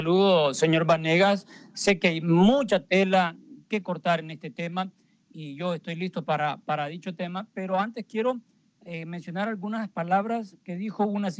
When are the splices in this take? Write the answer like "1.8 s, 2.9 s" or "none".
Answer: none